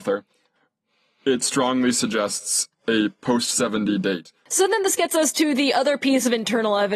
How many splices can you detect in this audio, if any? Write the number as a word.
zero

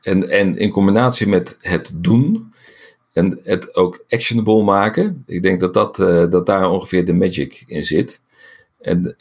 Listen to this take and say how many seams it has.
zero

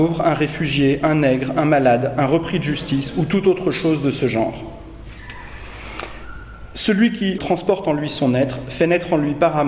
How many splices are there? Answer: one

